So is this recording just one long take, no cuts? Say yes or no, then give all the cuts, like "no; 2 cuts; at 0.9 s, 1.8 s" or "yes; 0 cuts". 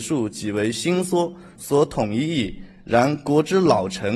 no; 1 cut; at 1.6 s